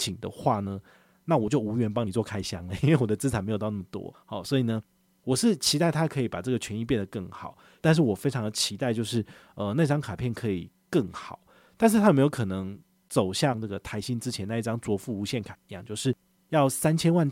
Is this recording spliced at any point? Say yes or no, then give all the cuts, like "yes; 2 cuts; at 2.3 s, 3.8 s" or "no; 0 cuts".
yes; 1 cut; at 7.8 s